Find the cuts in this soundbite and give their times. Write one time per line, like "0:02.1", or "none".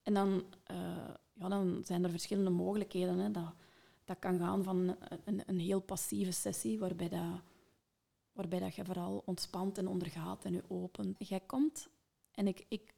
0:11.2